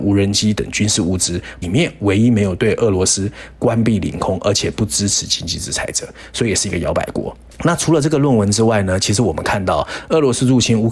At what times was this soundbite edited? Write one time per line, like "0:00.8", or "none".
0:01.6